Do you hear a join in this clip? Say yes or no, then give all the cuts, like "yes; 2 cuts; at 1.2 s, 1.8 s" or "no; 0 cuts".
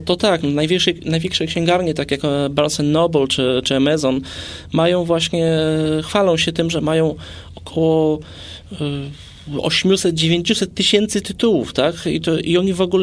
no; 0 cuts